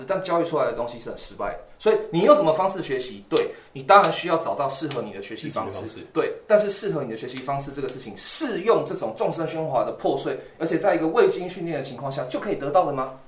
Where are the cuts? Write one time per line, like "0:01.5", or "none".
none